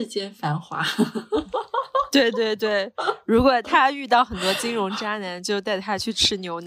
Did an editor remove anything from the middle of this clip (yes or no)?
no